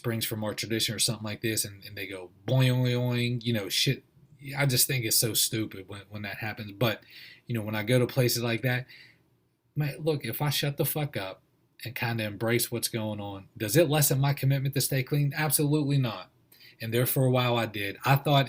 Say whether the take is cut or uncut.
uncut